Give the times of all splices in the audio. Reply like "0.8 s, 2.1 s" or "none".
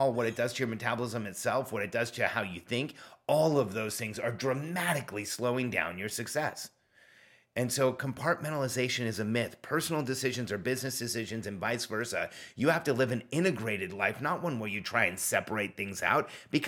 none